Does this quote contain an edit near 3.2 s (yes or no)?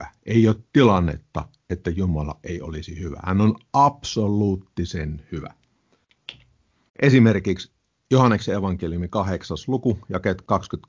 no